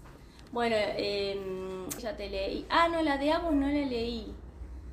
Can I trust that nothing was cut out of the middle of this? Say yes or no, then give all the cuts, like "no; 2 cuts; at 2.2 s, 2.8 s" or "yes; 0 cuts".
no; 1 cut; at 2.0 s